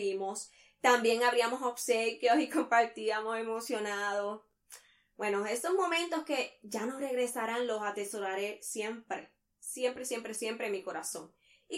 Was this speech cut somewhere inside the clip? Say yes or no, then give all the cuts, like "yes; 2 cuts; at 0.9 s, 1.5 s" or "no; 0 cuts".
no; 0 cuts